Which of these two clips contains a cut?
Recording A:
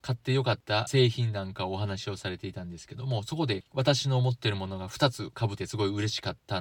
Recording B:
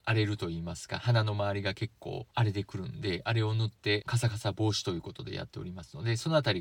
A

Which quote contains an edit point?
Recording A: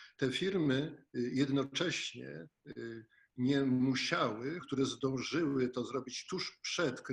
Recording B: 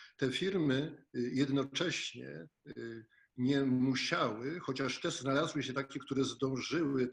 A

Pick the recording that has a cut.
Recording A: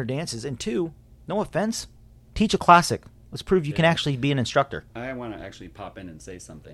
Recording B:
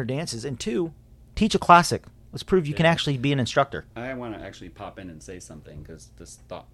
B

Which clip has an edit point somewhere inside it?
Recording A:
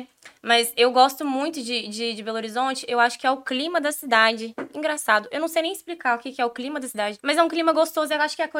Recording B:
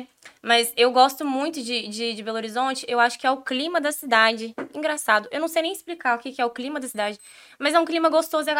A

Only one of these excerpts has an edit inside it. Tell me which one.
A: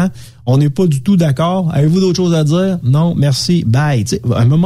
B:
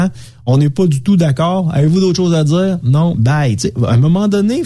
B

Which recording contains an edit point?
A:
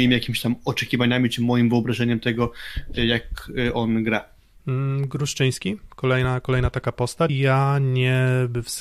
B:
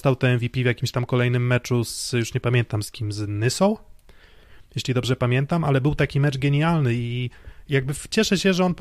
A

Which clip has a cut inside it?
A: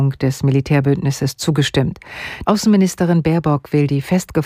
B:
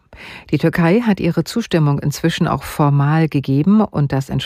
A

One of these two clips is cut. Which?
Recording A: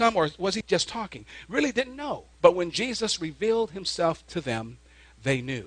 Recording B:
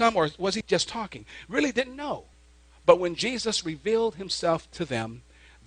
A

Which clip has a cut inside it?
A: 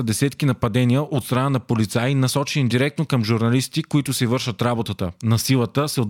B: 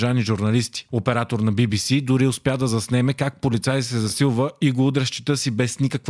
A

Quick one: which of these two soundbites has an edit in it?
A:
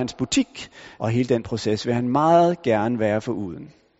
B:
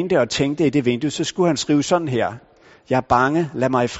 A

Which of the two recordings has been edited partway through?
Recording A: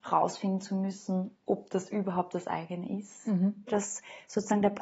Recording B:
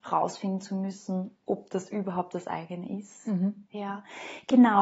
A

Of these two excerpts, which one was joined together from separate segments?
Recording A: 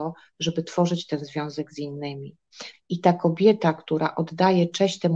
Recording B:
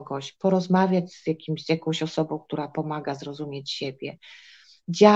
A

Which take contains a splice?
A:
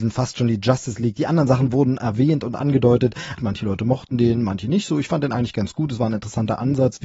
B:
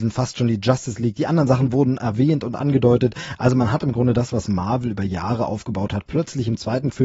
A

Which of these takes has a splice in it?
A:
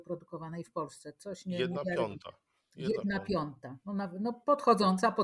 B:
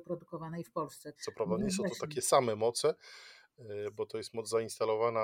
B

